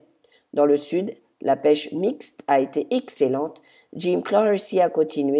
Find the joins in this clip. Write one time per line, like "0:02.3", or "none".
none